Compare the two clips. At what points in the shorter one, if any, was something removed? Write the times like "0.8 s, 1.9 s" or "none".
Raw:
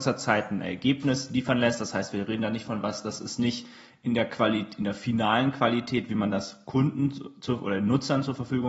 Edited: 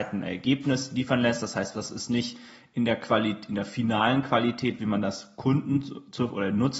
1.7 s